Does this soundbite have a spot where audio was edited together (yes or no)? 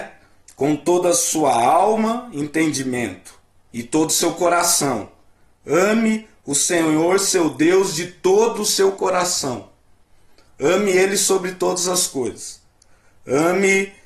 no